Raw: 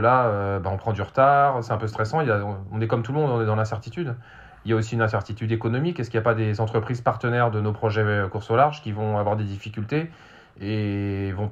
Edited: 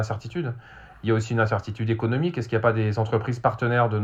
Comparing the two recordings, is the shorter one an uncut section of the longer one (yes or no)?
yes